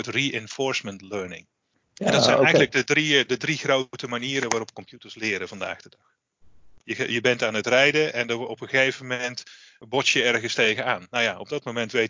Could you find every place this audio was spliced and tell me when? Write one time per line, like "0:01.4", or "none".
0:06.8